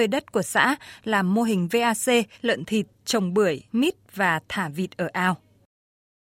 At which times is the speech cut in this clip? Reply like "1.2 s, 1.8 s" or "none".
2.3 s, 3.7 s